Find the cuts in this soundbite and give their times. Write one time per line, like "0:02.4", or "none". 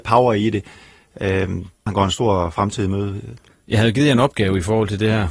0:01.9
0:03.5